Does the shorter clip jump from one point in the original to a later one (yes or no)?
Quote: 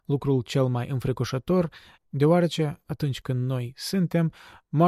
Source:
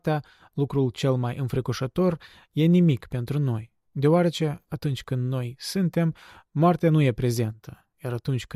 yes